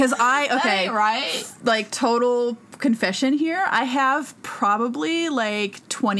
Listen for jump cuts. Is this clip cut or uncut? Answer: uncut